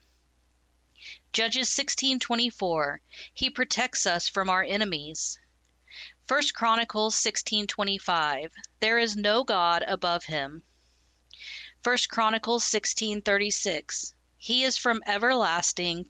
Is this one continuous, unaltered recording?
yes; 0 cuts

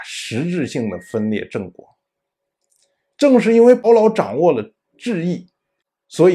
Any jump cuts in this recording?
yes; 1 cut; at 3.8 s

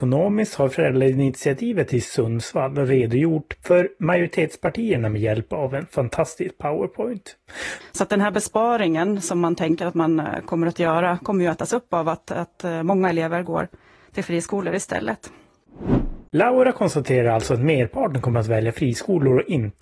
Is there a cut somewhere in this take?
yes; 1 cut; at 7.8 s

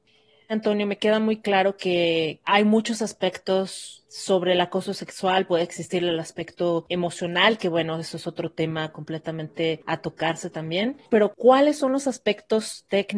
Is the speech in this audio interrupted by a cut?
no; 0 cuts

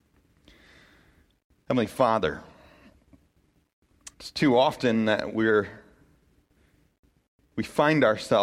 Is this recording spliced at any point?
yes; 1 cut; at 4.1 s

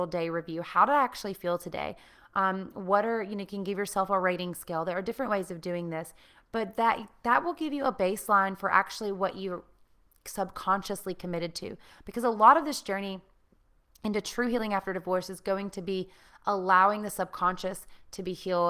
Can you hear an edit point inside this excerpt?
no; 0 cuts

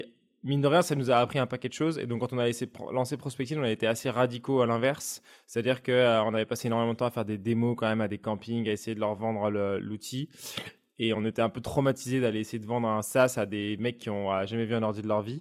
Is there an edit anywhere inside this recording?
no; 0 cuts

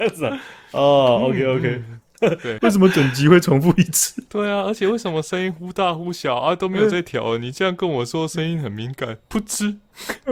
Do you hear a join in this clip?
yes; 1 cut; at 2.6 s

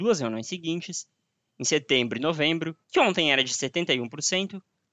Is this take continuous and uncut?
no; 1 cut; at 2.8 s

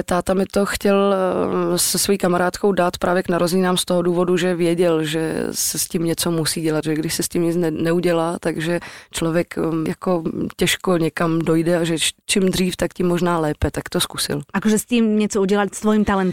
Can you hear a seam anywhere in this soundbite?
no; 0 cuts

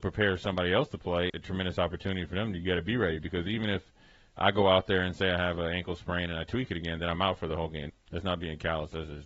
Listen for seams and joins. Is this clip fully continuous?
no; 2 cuts; at 1.3 s, 7.9 s

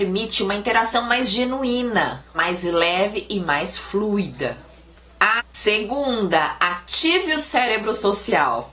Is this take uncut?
no; 2 cuts; at 2.3 s, 5.4 s

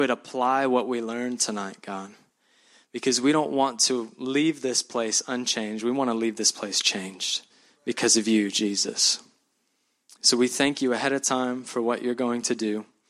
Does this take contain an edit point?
no; 0 cuts

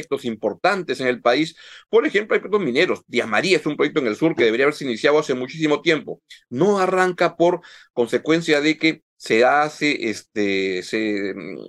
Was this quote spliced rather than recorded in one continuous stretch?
no; 0 cuts

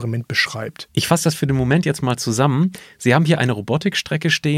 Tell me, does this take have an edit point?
no; 0 cuts

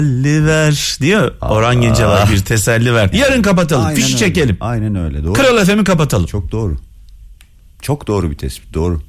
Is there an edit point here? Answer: yes; 1 cut; at 3.1 s

